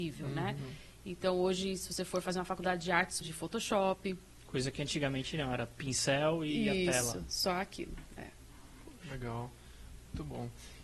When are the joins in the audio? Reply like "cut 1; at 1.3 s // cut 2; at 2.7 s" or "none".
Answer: cut 1; at 3.2 s

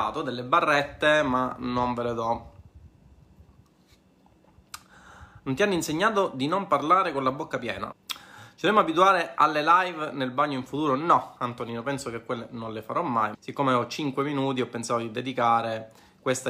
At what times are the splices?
cut 1; at 7.9 s // cut 2; at 13.3 s

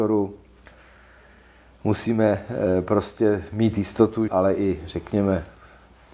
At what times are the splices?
cut 1; at 4.3 s

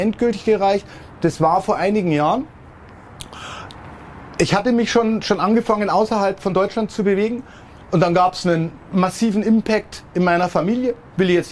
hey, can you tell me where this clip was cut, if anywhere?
none

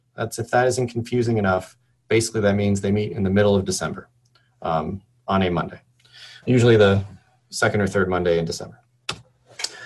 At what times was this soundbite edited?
cut 1; at 6.4 s

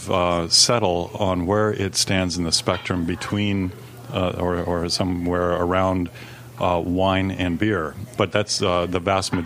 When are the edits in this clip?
cut 1; at 8.2 s

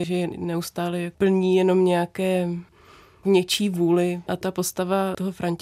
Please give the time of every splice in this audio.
cut 1; at 4.3 s

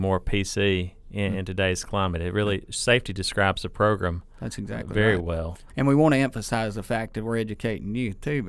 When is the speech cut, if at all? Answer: cut 1; at 5.7 s

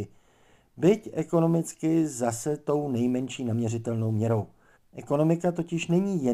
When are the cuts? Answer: cut 1; at 4.7 s

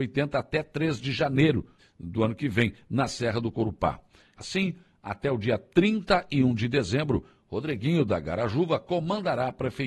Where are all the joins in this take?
cut 1; at 1.8 s // cut 2; at 4.4 s

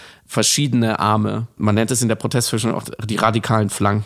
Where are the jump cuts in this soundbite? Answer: none

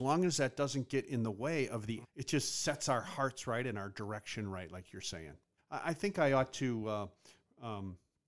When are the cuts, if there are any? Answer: cut 1; at 2.0 s // cut 2; at 5.6 s

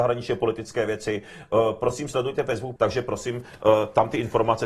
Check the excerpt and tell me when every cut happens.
cut 1; at 2.8 s

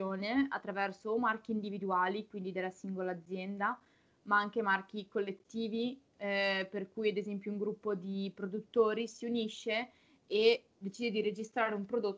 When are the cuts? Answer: none

